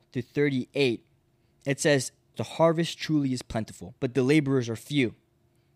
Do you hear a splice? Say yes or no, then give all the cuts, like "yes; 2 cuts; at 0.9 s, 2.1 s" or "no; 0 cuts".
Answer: yes; 2 cuts; at 2.3 s, 4.0 s